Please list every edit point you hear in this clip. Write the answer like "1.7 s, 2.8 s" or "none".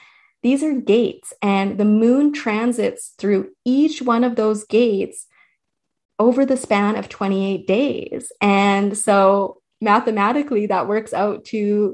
none